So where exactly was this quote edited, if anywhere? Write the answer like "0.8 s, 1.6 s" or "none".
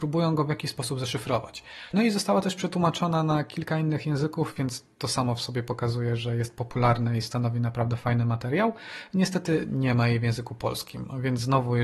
1.9 s